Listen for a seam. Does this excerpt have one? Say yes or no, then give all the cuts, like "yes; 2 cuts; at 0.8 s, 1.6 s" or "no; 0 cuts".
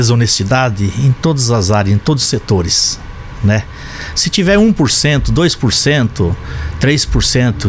no; 0 cuts